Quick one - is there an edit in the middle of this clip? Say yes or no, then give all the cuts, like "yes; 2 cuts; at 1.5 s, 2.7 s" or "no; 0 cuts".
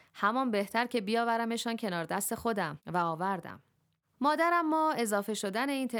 no; 0 cuts